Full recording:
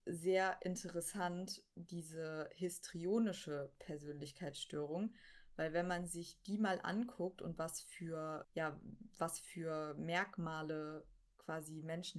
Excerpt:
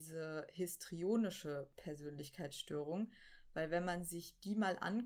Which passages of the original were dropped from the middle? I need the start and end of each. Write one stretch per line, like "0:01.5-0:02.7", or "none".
none